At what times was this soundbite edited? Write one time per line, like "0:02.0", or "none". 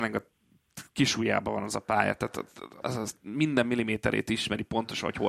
0:02.8